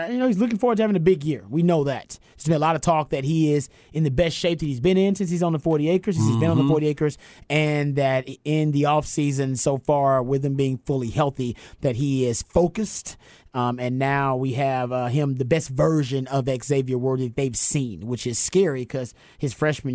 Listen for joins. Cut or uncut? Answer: uncut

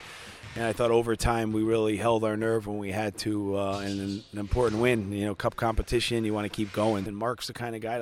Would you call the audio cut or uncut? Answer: cut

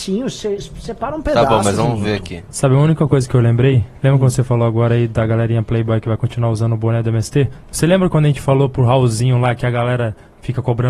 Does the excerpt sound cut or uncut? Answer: uncut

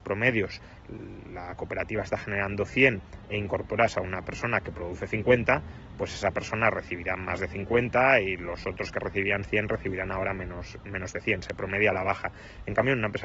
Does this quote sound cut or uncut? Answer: uncut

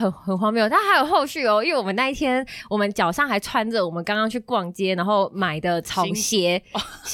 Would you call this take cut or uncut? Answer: uncut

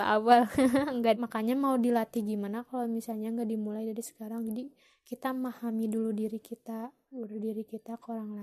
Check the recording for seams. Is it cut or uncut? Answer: cut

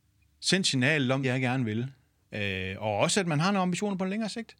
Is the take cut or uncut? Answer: cut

